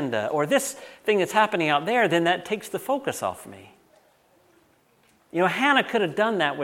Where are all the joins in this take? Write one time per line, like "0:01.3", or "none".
none